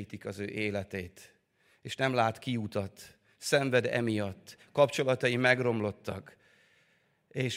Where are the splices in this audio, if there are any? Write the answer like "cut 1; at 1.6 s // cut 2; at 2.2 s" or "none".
none